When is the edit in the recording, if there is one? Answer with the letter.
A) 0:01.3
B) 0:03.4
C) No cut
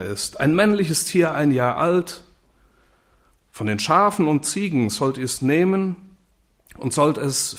C